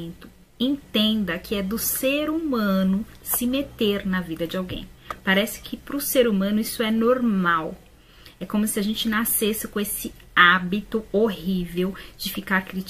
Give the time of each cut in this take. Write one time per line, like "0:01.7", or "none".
none

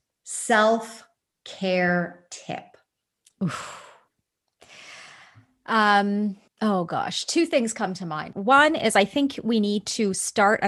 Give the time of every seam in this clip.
0:06.5
0:08.3

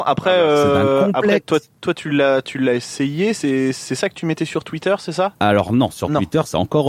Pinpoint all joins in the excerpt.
none

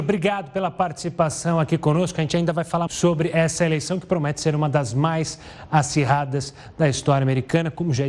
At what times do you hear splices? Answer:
0:02.9

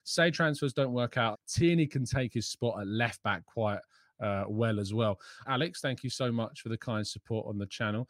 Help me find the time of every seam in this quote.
0:01.3
0:05.4

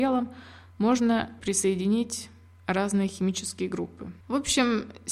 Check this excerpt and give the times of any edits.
0:04.2

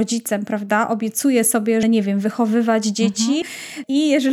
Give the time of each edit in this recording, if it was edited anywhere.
0:01.8
0:03.4

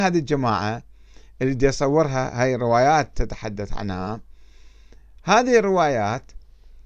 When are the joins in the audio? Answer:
none

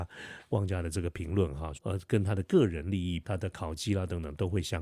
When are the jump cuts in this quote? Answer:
0:01.7
0:03.2

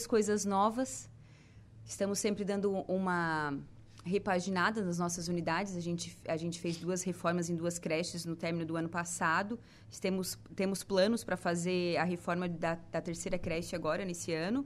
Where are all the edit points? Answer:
none

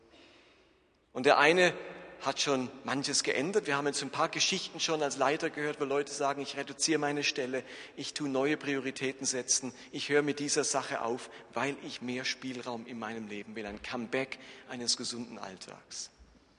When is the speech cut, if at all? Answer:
none

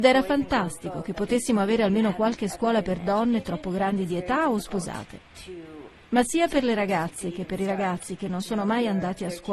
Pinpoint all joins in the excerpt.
none

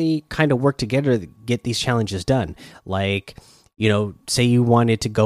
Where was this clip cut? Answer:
none

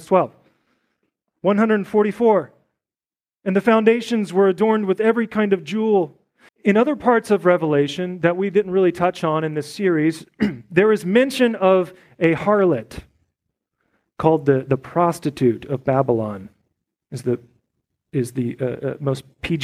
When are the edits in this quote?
0:06.5

